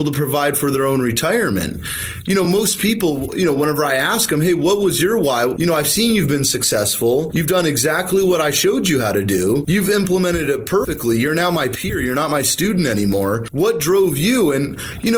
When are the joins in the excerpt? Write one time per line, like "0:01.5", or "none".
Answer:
none